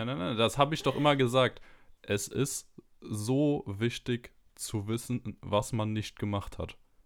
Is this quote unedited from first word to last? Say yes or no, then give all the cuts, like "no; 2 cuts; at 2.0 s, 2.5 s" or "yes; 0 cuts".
no; 1 cut; at 2.0 s